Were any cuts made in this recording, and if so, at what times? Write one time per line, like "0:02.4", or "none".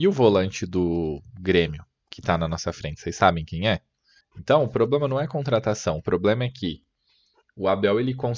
0:04.2